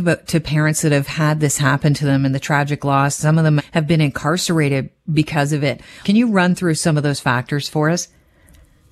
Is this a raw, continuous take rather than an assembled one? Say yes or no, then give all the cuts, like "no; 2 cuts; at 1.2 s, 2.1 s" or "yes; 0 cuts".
no; 2 cuts; at 3.6 s, 6.0 s